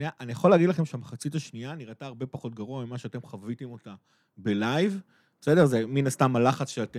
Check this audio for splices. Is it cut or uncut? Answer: uncut